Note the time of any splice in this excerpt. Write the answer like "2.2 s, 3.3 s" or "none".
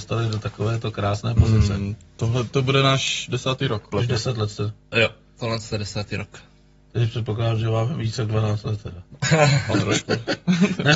3.9 s